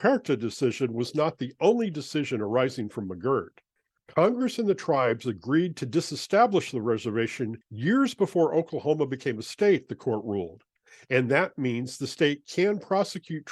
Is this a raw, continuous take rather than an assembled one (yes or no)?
no